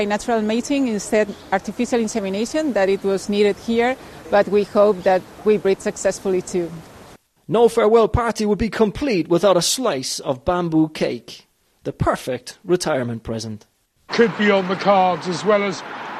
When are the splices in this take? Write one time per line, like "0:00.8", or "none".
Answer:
0:14.1